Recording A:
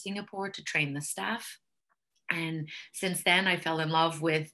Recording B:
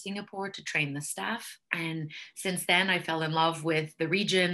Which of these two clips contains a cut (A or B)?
B